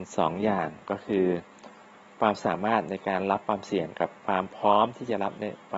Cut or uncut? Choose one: cut